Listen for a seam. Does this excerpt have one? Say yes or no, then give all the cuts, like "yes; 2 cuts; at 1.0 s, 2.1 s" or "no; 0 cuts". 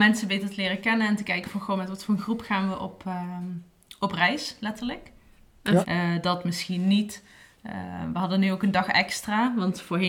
yes; 1 cut; at 5.8 s